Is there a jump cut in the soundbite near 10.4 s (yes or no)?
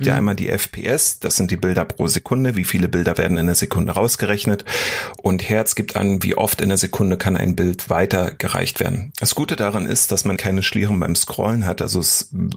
yes